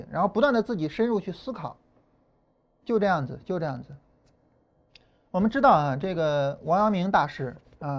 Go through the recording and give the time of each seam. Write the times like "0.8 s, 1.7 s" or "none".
none